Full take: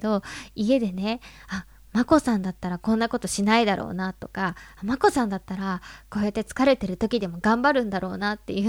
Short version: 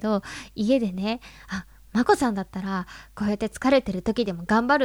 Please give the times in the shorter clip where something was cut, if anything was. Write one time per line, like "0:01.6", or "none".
0:02.1